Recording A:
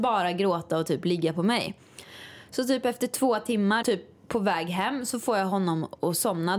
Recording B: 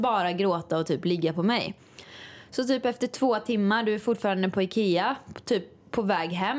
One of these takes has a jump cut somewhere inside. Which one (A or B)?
A